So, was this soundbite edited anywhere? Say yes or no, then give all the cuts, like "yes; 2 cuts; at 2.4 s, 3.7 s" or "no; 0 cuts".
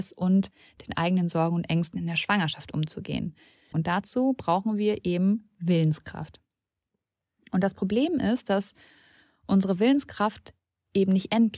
yes; 1 cut; at 3.7 s